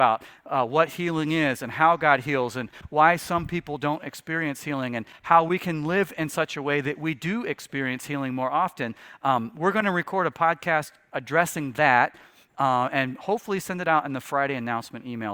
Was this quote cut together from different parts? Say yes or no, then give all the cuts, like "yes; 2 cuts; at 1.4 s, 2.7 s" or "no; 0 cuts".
no; 0 cuts